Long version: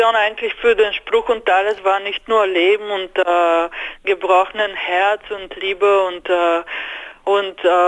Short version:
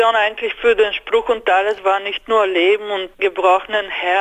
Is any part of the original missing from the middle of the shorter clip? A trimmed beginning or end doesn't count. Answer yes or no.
yes